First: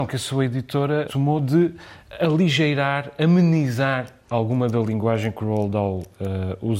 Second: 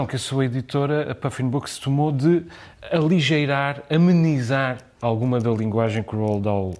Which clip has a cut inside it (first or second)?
first